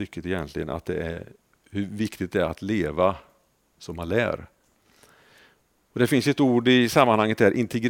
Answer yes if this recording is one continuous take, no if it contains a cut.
yes